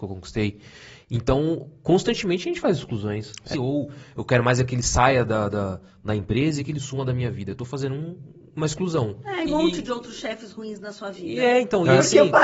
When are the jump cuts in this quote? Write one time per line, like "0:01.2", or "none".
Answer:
0:03.5
0:09.5